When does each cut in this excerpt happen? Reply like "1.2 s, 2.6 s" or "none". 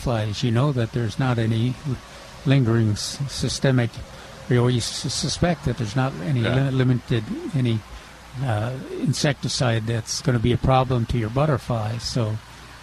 10.2 s